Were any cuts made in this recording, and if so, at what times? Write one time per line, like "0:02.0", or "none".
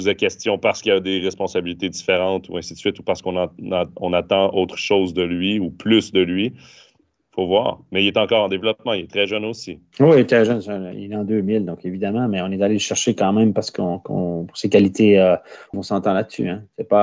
0:15.7